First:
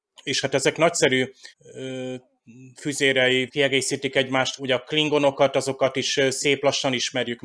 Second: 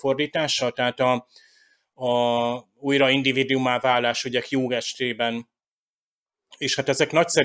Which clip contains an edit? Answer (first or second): first